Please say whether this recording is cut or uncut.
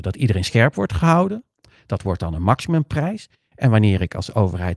cut